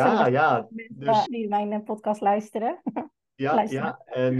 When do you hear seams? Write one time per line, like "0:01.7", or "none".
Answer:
0:01.3